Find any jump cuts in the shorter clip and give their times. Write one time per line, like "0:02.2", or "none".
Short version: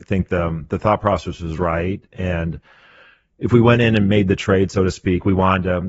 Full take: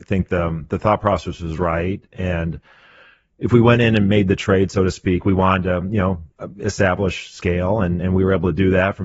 none